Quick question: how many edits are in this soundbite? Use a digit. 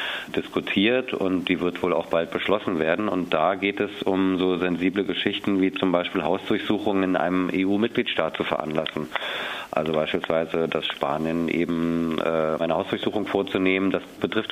1